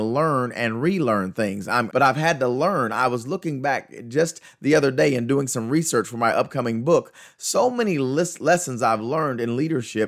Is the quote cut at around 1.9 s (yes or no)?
yes